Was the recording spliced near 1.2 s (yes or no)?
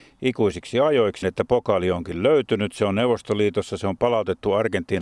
yes